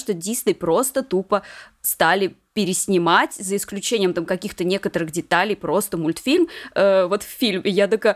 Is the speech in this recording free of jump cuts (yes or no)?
yes